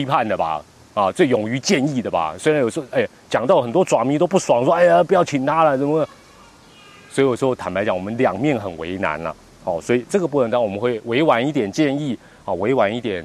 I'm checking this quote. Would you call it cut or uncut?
uncut